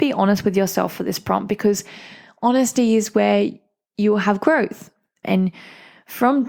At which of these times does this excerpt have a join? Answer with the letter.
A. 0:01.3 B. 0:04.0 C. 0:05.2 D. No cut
C